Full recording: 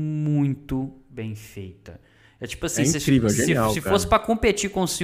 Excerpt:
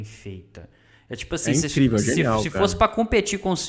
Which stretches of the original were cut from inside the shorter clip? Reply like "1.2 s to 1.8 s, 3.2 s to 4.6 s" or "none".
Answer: none